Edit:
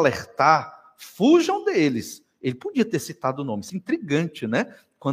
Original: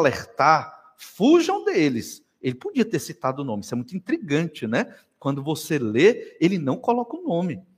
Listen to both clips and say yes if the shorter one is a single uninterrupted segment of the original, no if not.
no